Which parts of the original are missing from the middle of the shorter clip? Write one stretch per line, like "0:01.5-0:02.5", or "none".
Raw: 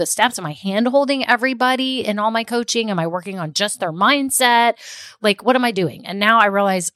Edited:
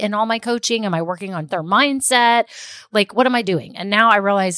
0:03.5-0:03.8